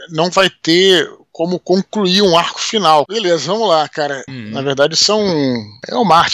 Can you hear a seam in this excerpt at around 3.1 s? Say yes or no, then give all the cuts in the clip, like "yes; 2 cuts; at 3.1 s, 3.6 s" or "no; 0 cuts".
yes; 2 cuts; at 3.1 s, 4.3 s